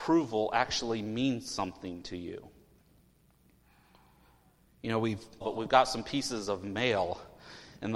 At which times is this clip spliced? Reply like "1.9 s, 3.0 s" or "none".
5.4 s